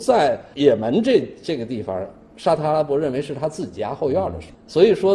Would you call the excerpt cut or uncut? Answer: uncut